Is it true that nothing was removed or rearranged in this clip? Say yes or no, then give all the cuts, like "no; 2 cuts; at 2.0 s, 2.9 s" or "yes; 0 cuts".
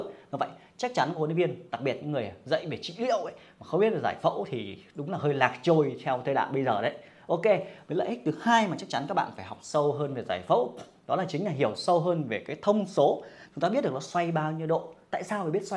no; 1 cut; at 13.5 s